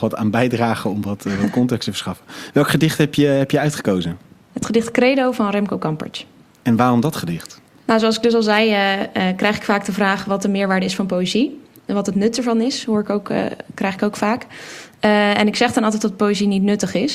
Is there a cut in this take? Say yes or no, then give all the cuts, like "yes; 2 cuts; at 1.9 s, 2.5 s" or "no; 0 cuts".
no; 0 cuts